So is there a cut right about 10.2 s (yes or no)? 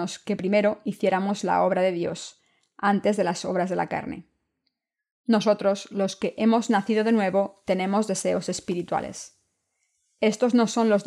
no